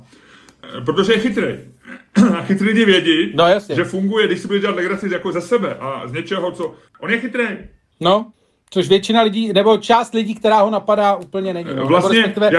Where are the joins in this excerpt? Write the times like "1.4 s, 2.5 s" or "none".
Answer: 6.9 s